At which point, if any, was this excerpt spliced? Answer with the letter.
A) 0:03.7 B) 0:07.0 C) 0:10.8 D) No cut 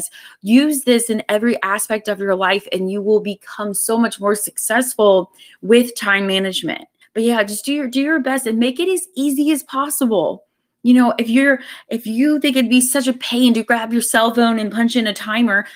B